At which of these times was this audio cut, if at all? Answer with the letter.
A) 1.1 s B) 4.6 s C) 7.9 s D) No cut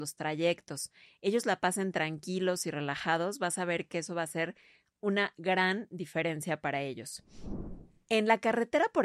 D